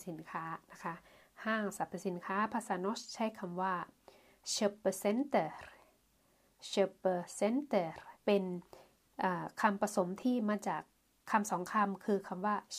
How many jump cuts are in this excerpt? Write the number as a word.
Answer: one